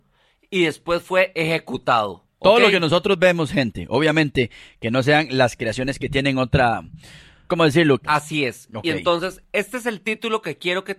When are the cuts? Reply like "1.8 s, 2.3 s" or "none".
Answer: 8.0 s